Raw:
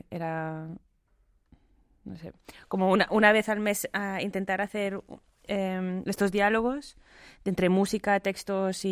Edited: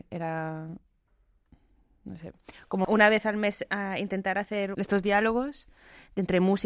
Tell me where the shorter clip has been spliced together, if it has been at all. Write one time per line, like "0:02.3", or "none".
0:02.8
0:04.7